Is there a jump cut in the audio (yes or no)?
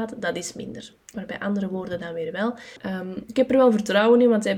yes